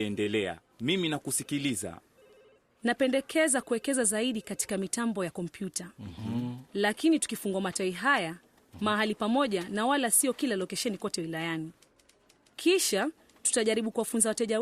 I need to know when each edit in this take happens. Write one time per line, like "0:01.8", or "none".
none

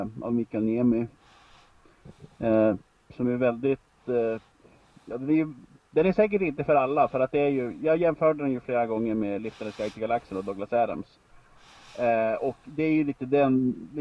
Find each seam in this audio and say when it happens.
none

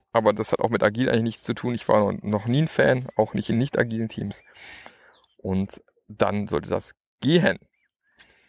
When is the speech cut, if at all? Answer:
none

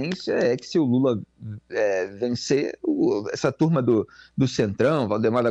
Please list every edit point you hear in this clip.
none

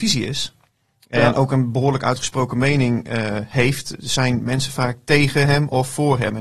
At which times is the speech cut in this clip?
none

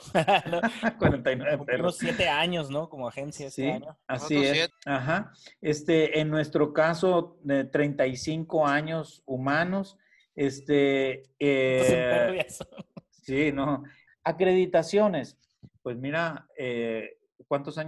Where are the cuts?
0:04.7
0:14.1
0:16.5

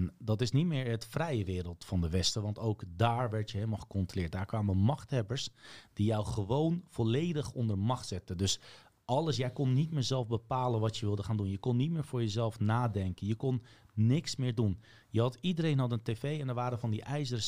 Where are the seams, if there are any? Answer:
none

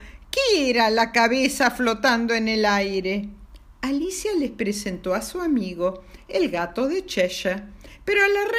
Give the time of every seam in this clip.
none

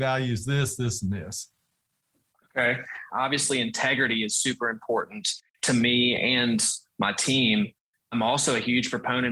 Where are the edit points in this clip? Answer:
0:03.1
0:08.1

